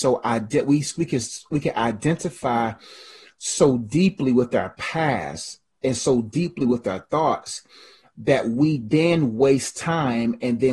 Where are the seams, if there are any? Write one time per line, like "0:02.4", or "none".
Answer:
none